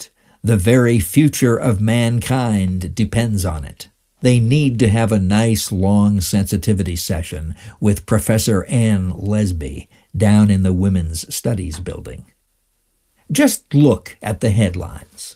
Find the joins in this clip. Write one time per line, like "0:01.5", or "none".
0:04.2
0:13.2

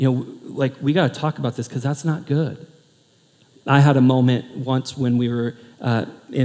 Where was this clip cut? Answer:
none

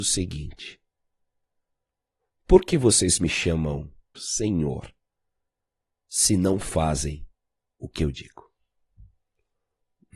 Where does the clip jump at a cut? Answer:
0:04.1

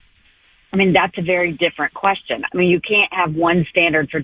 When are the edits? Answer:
0:02.5

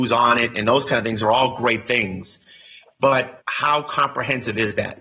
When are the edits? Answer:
0:03.4

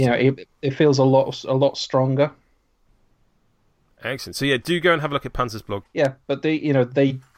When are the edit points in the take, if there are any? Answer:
0:05.8

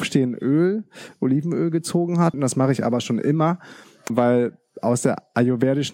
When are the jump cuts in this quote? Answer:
0:02.3
0:04.1

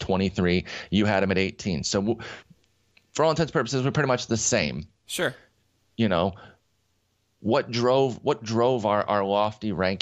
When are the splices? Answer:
none

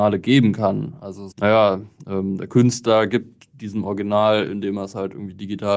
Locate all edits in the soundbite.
0:01.3

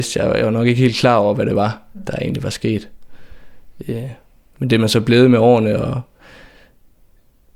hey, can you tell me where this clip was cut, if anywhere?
none

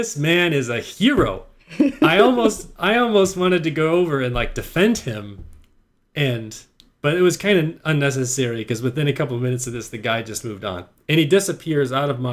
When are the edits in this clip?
none

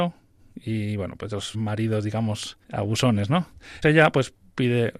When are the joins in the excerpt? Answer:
0:01.5
0:02.6
0:03.8

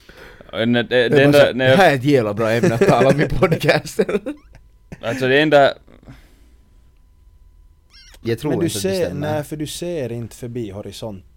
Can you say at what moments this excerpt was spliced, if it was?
0:08.2

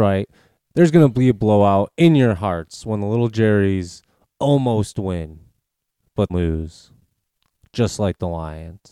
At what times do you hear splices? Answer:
0:06.3

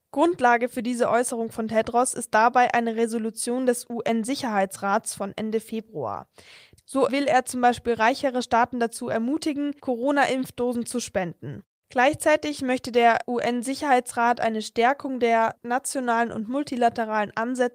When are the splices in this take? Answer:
0:06.8
0:15.6

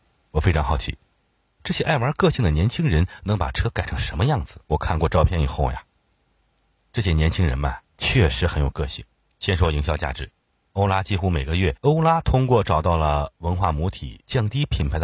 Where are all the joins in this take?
0:04.6
0:09.3
0:11.8

